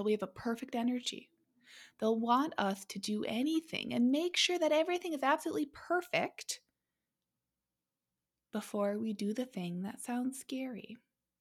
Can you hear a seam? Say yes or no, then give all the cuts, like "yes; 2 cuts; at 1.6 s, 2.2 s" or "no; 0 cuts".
no; 0 cuts